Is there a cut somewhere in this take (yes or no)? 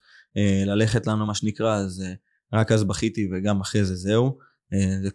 no